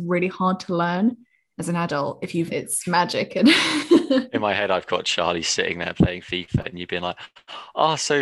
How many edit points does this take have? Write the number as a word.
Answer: one